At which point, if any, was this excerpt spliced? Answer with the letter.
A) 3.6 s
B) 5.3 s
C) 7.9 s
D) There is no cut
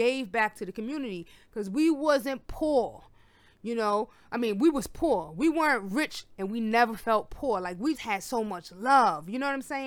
C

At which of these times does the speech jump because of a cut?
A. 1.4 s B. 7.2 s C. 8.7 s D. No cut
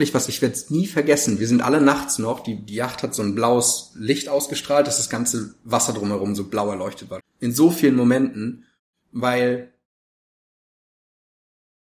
B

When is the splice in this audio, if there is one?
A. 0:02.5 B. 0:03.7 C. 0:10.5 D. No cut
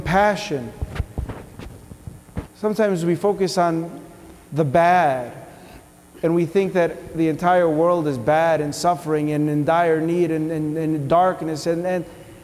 A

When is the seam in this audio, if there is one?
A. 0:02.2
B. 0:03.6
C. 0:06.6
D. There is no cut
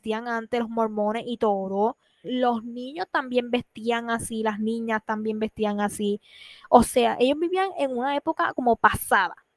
A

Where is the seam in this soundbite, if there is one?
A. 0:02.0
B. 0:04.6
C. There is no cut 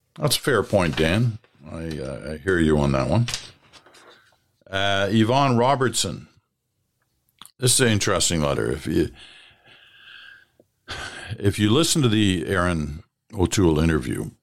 C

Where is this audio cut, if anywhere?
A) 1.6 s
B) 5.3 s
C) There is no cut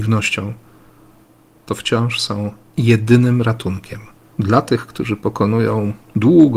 C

